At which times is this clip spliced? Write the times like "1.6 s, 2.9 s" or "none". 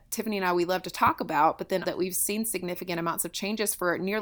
1.8 s